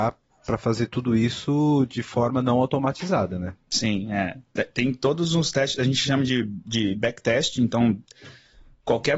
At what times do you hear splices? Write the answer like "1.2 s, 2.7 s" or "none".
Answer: none